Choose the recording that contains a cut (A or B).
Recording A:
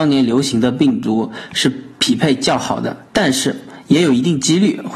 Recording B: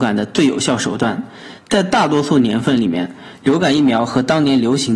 A